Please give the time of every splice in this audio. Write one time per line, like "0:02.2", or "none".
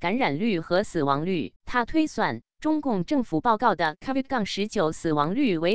0:01.6